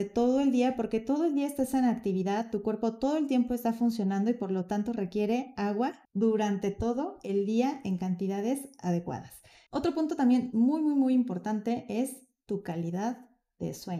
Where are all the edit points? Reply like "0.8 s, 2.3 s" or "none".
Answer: 6.0 s, 9.7 s